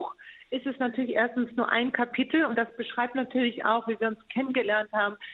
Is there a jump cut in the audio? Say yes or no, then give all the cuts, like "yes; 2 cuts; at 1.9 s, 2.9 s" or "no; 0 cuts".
no; 0 cuts